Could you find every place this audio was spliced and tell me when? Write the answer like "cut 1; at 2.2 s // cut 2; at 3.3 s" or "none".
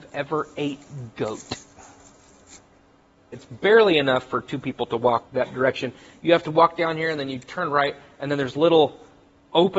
cut 1; at 3.3 s // cut 2; at 5.3 s